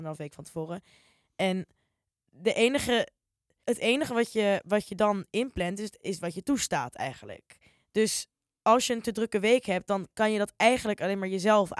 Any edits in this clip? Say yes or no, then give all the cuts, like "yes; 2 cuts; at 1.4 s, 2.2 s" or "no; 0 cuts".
yes; 1 cut; at 3.6 s